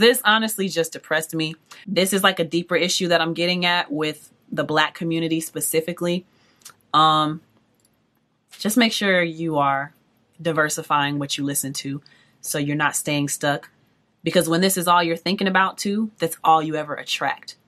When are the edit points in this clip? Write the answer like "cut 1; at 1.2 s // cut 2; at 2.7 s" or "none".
cut 1; at 1.8 s